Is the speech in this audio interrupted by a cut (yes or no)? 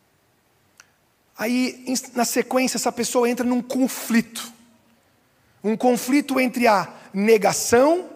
no